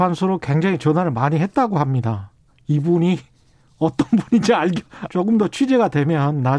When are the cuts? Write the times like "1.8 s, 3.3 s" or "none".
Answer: 5.1 s

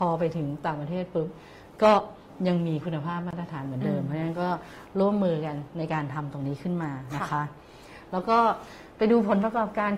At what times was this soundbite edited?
none

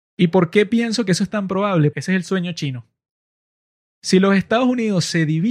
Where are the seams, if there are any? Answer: 1.9 s

